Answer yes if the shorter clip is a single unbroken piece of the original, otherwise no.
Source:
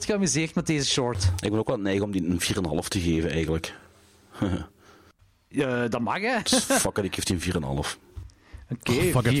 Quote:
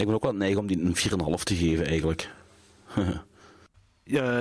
yes